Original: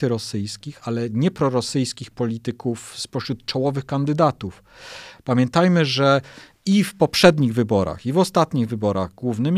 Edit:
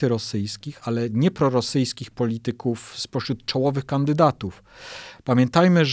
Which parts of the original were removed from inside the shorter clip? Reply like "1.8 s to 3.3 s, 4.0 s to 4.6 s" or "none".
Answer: none